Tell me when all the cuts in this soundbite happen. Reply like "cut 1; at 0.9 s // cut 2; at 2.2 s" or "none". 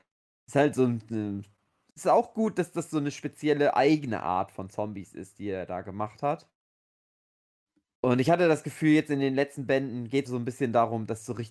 cut 1; at 10.2 s